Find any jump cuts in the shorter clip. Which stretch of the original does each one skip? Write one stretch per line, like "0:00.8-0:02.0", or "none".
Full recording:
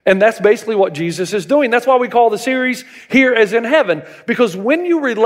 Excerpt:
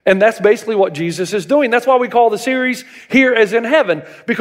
none